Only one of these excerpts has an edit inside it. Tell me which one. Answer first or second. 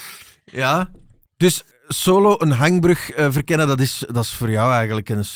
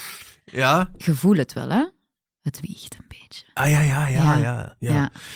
second